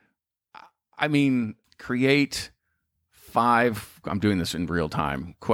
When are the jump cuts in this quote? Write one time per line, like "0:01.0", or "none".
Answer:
0:01.6